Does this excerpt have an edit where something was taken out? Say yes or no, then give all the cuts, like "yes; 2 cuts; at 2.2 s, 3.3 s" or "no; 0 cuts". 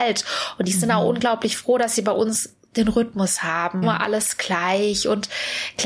yes; 1 cut; at 3.8 s